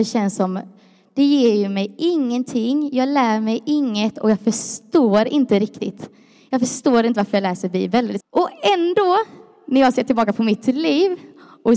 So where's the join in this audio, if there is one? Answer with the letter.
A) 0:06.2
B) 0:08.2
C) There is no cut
B